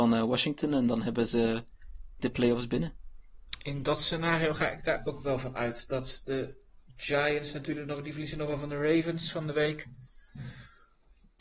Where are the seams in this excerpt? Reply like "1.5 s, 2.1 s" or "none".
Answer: 2.2 s